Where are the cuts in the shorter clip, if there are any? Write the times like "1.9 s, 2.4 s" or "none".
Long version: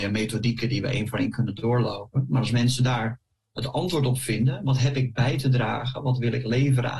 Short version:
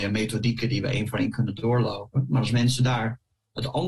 none